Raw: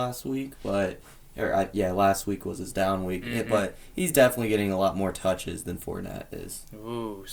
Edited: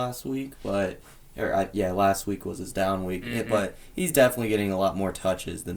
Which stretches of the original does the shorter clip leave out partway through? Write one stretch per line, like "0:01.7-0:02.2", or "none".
none